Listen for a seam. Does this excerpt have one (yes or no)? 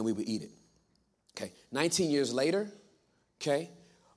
no